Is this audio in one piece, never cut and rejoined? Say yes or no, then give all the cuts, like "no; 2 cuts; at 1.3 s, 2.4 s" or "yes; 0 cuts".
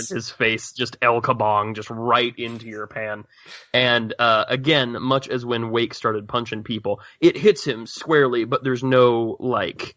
yes; 0 cuts